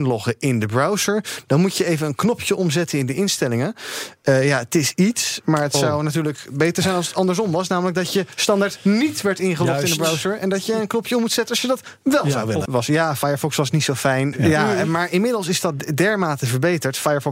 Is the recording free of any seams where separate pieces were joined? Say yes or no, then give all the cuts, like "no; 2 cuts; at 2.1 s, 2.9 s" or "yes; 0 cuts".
no; 2 cuts; at 12.6 s, 14.3 s